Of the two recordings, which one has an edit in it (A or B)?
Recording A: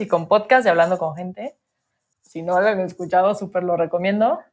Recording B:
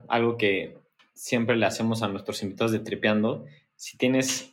A